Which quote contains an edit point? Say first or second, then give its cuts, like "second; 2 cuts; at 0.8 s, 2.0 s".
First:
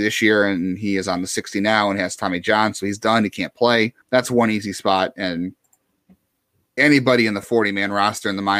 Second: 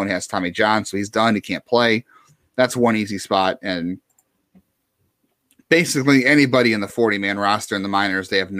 first; 2 cuts; at 4.0 s, 6.8 s